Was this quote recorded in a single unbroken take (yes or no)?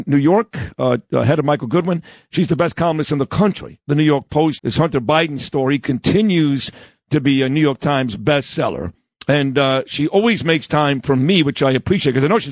no